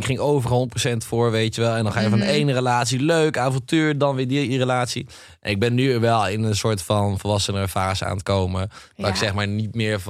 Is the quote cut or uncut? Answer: uncut